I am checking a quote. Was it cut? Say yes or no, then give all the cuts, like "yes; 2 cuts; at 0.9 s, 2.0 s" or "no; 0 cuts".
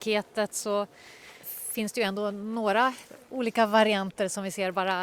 yes; 1 cut; at 1.4 s